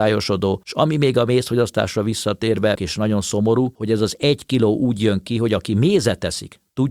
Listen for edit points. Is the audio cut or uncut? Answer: cut